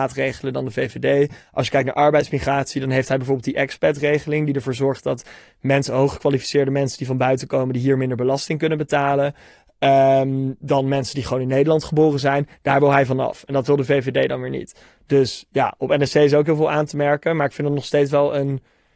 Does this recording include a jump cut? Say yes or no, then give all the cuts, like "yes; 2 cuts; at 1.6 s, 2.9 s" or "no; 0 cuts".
no; 0 cuts